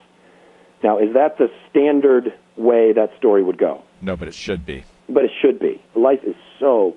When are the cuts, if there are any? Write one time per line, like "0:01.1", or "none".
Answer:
0:05.9